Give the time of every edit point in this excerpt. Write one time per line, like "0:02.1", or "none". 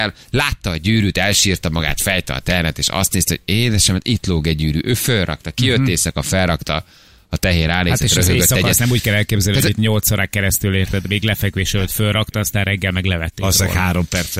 none